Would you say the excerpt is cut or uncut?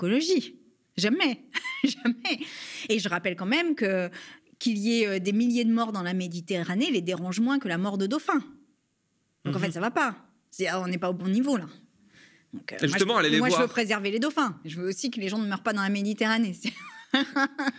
uncut